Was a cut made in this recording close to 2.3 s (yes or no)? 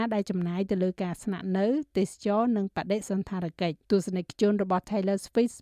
no